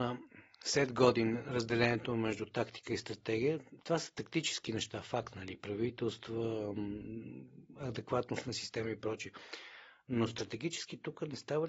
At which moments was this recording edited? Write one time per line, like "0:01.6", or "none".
none